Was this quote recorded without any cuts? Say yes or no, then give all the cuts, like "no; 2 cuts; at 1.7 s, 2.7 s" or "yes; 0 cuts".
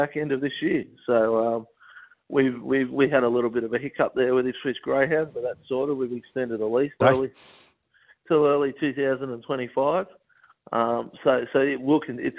no; 1 cut; at 7.0 s